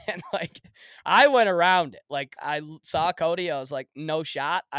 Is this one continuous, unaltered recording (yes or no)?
no